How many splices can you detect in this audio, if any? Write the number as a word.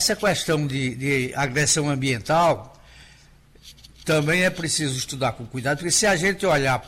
zero